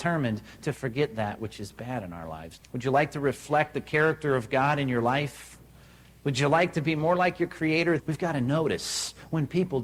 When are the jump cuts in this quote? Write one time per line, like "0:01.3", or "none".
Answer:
0:02.6
0:08.0